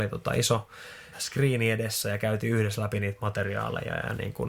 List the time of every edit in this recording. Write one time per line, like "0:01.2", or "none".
0:01.1